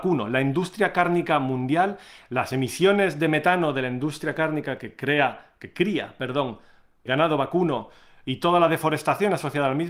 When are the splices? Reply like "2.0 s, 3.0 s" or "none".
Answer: 7.1 s